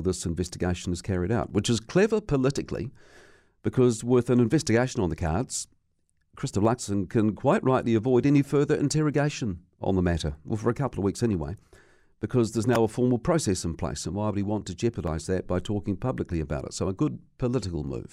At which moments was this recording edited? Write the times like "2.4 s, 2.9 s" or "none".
none